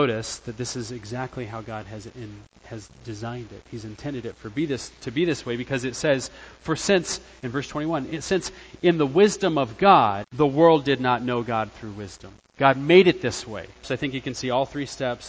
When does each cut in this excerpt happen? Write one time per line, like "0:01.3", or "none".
0:10.2
0:13.8